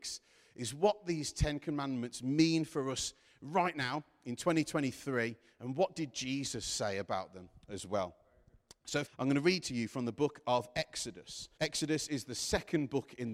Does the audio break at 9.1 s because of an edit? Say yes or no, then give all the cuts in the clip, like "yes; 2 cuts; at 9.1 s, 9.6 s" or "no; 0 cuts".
yes; 2 cuts; at 9.1 s, 11.6 s